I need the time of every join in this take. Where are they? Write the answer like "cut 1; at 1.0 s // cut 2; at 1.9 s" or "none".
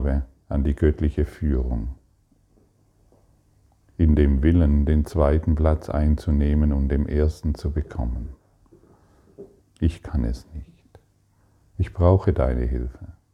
cut 1; at 9.6 s